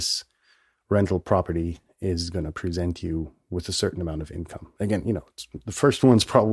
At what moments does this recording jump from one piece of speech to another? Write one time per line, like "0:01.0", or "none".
none